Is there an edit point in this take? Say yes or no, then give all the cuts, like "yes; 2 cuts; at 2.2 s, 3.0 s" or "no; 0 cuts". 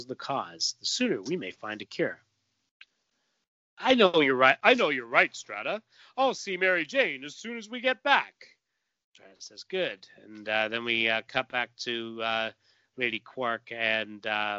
no; 0 cuts